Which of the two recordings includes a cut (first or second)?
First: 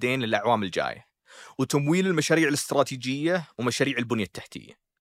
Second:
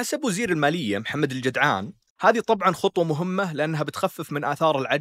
second